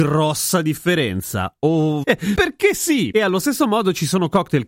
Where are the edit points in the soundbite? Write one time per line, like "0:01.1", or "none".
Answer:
0:02.0